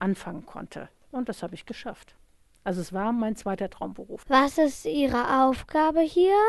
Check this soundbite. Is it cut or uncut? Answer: uncut